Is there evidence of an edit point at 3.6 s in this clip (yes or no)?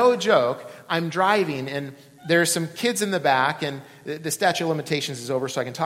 no